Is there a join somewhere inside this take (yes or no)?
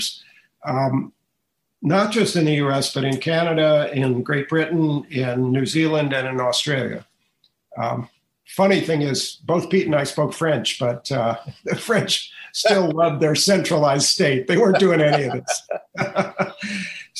no